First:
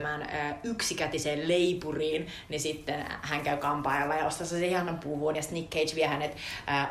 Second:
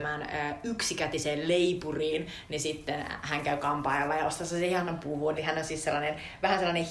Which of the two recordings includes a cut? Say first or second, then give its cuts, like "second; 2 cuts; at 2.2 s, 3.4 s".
second; 1 cut; at 5.3 s